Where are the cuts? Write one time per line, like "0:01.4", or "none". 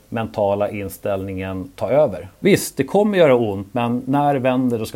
0:02.4
0:03.7